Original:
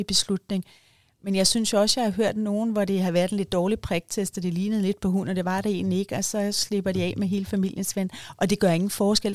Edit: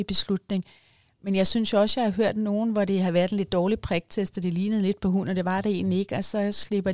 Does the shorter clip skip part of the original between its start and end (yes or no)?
no